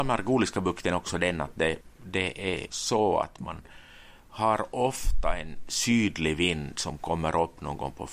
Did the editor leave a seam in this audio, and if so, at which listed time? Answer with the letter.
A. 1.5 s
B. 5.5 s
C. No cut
C